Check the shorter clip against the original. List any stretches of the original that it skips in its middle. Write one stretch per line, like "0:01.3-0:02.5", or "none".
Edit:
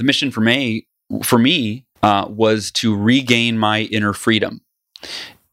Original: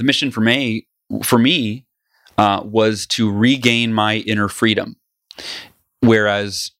0:02.0-0:02.3

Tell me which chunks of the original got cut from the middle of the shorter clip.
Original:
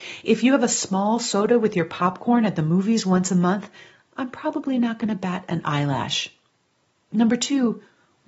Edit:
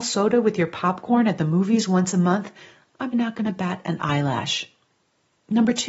0:04.3-0:04.8

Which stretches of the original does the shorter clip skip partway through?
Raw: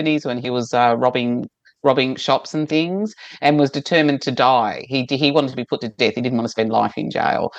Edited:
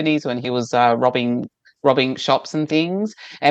none

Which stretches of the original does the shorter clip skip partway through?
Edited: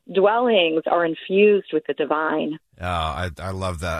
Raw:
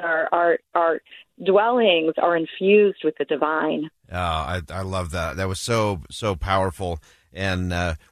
none

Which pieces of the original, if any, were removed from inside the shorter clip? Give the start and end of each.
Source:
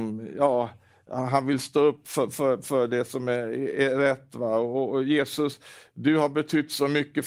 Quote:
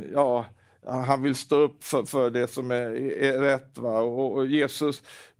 0:02.3-0:02.6

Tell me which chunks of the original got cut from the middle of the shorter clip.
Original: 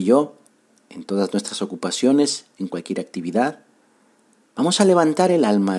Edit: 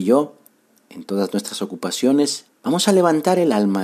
0:02.5-0:04.4

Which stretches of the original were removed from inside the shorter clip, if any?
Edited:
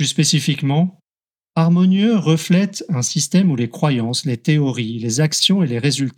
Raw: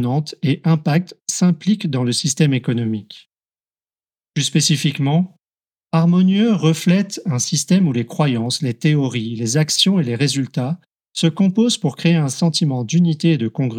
none

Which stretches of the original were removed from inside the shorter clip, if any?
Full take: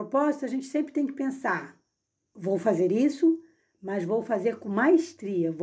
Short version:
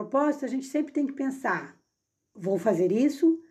none

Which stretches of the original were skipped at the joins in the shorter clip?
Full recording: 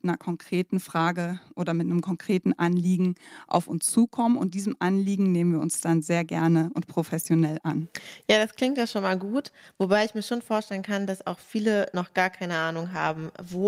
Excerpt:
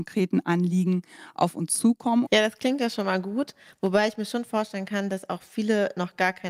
0:04.4-0:08.2

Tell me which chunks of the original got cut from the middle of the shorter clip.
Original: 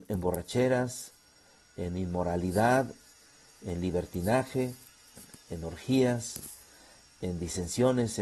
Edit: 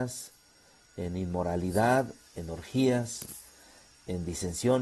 0:03.1-0:05.4

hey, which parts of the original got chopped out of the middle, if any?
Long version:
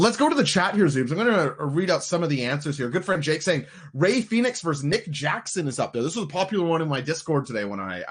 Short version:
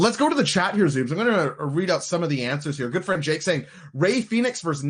none

